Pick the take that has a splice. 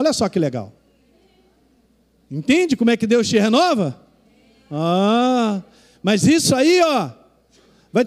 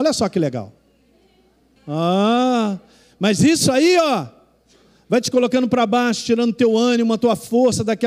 second; 1 cut; at 1.8 s

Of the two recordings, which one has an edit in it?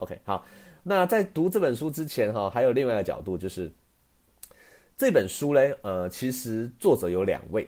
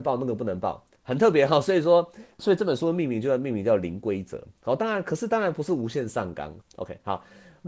second; 2 cuts; at 1.0 s, 6.6 s

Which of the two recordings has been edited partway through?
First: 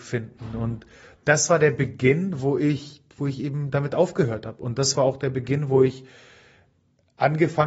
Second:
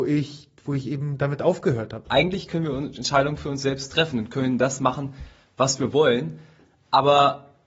second; 1 cut; at 2.0 s

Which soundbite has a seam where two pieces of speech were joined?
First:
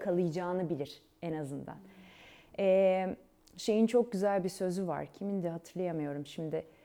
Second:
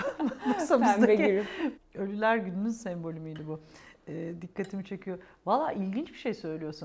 second; 1 cut; at 1.8 s

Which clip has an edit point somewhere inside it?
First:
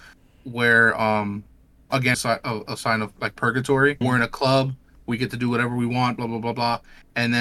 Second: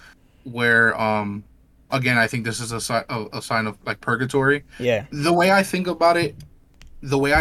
first; 2 cuts; at 2.1 s, 4.0 s

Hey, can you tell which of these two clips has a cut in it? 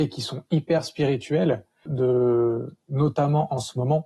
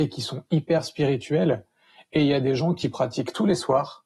first; 1 cut; at 1.9 s

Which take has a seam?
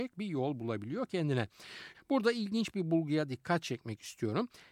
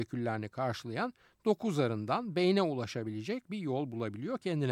first; 1 cut; at 1.9 s

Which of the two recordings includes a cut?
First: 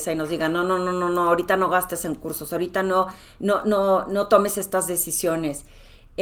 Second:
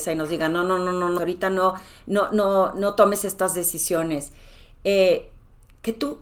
second; 1 cut; at 1.2 s

